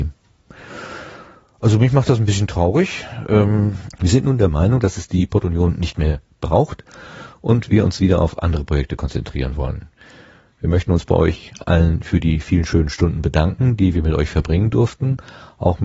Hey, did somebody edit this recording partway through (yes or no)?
yes